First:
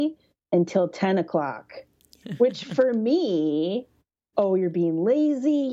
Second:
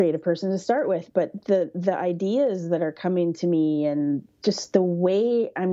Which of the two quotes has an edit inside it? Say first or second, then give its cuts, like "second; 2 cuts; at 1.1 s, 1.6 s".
first; 2 cuts; at 2.2 s, 4.3 s